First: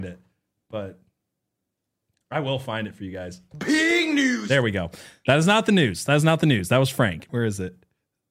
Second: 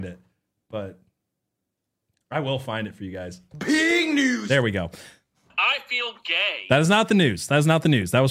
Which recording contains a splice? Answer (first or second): first